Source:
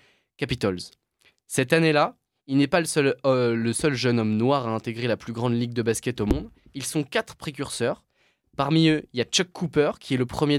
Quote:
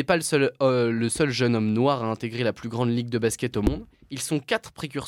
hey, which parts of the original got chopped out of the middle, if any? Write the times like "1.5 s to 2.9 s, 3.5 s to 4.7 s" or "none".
none